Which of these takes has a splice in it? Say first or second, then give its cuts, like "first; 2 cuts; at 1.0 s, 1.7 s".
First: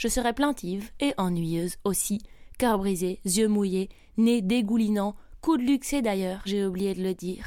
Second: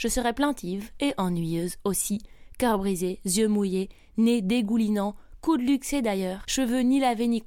second; 1 cut; at 6.4 s